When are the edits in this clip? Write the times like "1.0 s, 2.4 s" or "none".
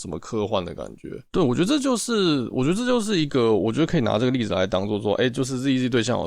1.3 s